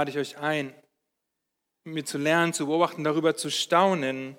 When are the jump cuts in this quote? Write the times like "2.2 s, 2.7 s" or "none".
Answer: none